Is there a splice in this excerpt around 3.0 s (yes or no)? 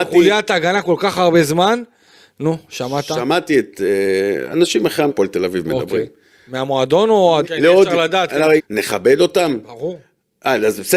no